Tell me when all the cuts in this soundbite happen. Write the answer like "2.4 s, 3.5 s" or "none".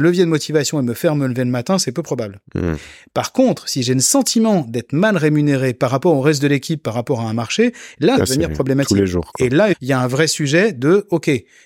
8.2 s, 9.7 s